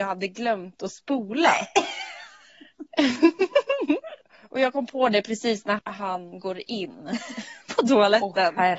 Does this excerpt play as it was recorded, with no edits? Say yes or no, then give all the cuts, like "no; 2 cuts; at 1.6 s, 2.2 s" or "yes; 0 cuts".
no; 1 cut; at 5.8 s